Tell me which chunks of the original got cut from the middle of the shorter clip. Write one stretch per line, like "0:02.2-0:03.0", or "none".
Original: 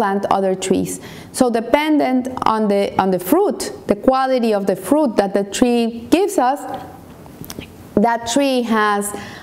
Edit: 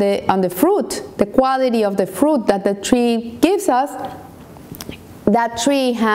none